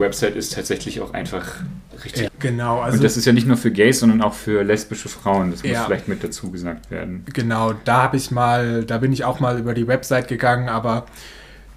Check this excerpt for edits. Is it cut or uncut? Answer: cut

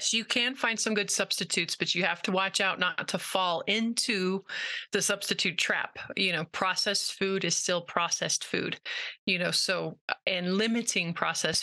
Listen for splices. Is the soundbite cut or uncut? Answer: uncut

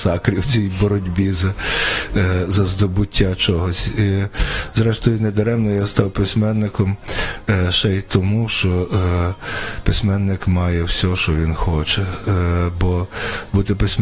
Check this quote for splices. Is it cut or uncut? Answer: uncut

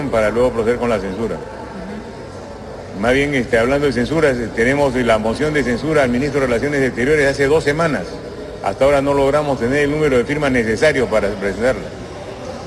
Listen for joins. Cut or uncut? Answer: uncut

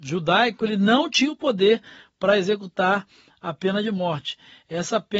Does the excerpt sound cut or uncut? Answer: uncut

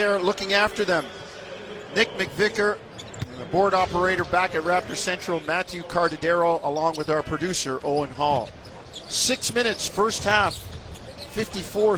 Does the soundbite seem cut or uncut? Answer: uncut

